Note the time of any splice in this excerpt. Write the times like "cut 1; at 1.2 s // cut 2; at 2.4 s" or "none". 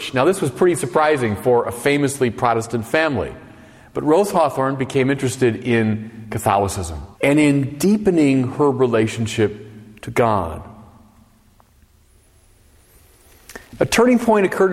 cut 1; at 7.1 s